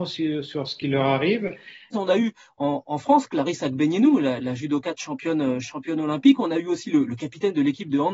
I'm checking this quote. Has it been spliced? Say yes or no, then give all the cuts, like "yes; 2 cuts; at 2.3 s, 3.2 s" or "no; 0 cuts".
yes; 1 cut; at 1.9 s